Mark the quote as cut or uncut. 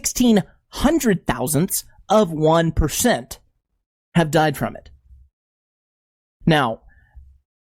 uncut